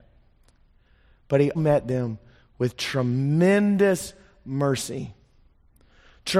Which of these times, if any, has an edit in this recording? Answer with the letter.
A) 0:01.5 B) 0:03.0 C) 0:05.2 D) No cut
A